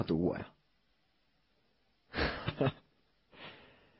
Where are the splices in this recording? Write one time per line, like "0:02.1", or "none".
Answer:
0:02.5